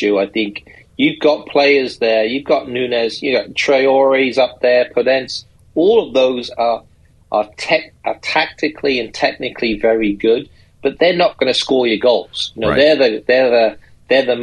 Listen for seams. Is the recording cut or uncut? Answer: uncut